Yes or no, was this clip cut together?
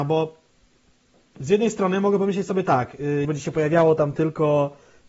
yes